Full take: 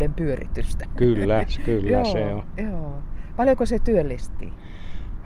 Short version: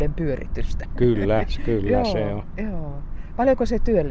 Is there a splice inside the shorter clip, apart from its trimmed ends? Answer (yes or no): no